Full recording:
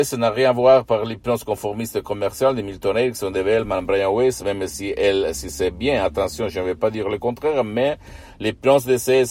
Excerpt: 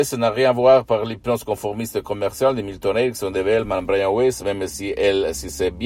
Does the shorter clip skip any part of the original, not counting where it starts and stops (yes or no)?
no